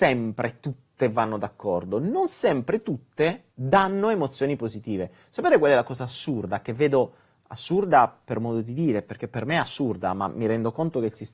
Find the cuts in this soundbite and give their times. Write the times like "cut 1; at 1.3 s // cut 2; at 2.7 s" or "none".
cut 1; at 3.5 s